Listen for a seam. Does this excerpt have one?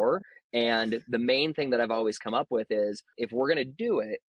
yes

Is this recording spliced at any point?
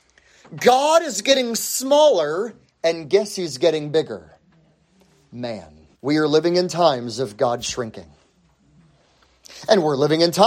yes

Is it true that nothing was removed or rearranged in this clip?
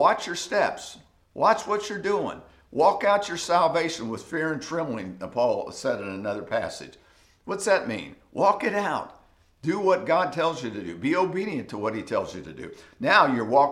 yes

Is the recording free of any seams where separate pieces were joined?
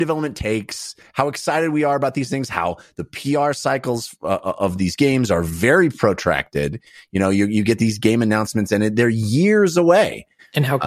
yes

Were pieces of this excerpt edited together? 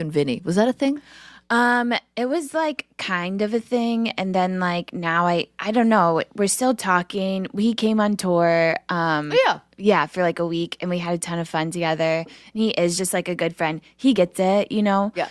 no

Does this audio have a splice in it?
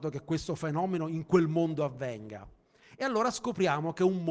no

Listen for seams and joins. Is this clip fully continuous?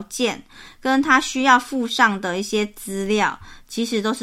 yes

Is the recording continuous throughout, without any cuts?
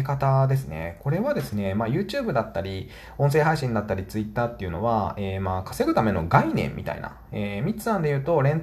yes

